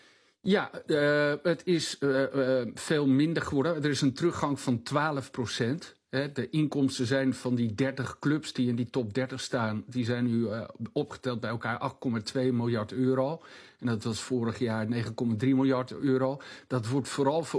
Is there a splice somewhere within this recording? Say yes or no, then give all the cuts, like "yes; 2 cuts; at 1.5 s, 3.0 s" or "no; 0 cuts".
no; 0 cuts